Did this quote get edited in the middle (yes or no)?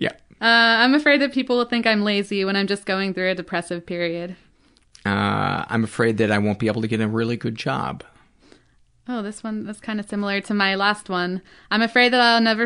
no